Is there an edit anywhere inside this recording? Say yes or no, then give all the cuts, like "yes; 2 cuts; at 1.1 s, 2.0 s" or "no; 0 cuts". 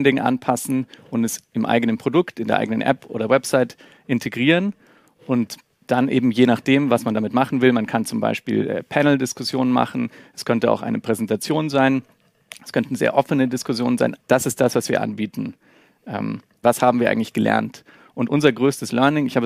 yes; 2 cuts; at 14.2 s, 16.6 s